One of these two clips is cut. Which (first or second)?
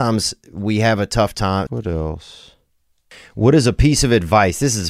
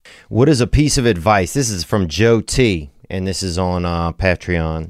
first